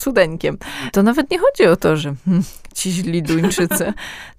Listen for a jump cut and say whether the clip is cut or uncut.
cut